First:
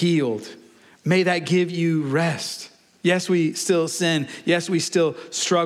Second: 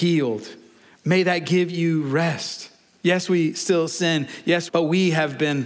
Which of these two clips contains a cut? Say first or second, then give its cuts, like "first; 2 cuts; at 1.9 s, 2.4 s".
second; 1 cut; at 4.7 s